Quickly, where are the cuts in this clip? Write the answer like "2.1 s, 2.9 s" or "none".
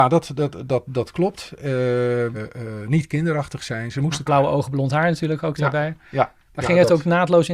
2.3 s, 4.3 s